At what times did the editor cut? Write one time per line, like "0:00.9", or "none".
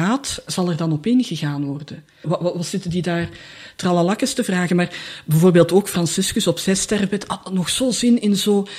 0:02.2